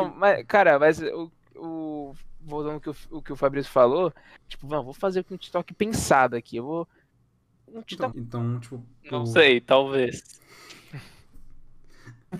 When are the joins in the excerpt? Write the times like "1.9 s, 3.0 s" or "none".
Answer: 4.5 s, 8.1 s